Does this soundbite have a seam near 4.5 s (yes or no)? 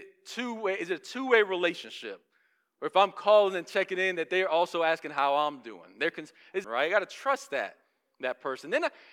no